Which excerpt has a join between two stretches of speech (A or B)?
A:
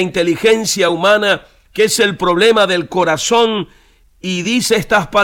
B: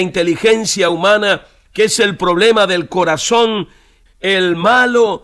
B